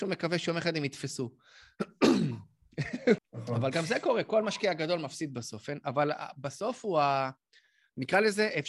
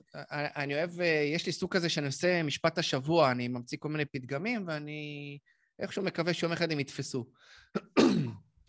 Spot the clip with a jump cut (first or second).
first